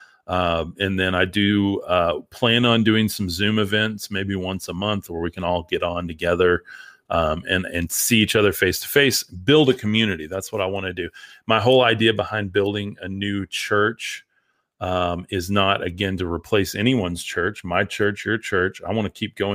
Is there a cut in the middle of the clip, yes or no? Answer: no